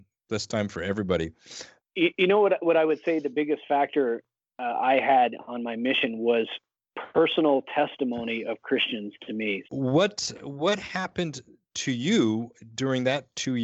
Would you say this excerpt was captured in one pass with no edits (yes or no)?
no